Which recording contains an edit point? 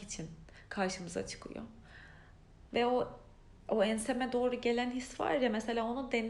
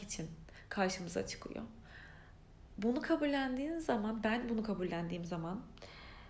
first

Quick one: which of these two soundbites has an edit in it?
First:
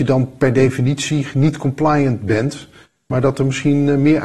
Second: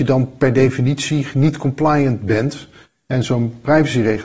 second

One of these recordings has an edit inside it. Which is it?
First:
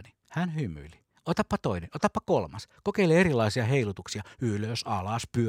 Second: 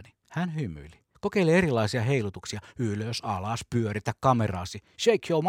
second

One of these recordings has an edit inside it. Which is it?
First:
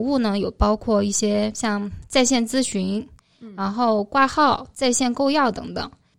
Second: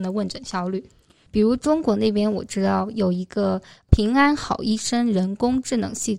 second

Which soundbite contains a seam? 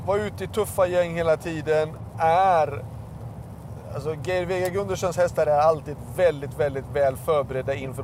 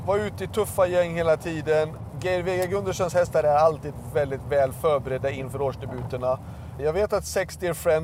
second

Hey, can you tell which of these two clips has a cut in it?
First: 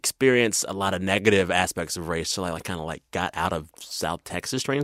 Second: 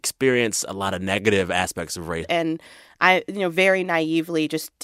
second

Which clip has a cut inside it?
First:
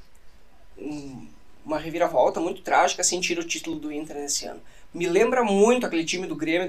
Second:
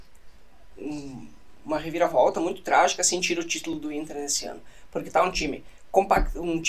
first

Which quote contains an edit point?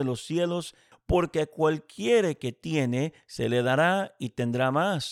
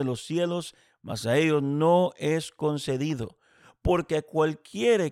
first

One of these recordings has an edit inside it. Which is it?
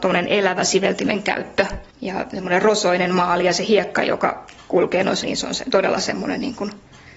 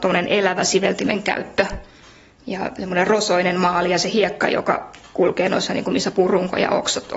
first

